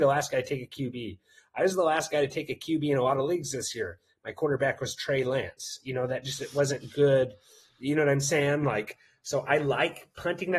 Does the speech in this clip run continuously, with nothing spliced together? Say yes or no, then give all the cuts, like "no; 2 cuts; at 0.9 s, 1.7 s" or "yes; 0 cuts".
yes; 0 cuts